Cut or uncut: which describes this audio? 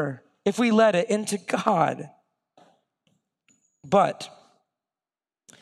uncut